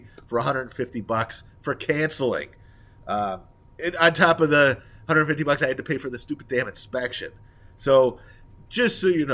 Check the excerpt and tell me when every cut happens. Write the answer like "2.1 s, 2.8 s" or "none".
none